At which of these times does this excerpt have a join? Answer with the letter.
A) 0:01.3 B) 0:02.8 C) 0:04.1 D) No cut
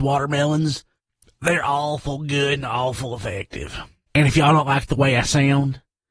C